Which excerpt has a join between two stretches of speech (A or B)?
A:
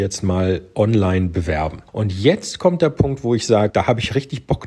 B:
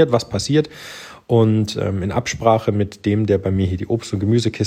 A